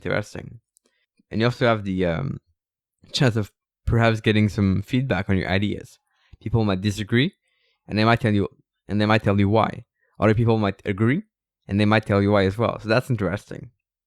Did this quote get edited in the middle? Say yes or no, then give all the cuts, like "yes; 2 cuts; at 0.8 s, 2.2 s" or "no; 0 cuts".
no; 0 cuts